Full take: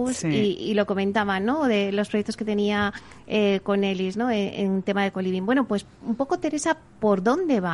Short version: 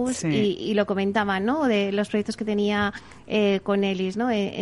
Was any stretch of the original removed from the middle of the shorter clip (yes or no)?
no